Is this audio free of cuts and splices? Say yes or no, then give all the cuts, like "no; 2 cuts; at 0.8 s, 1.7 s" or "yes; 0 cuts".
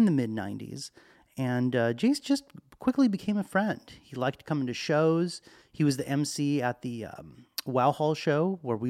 yes; 0 cuts